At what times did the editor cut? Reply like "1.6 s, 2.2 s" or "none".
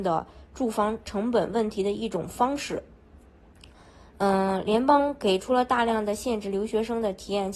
none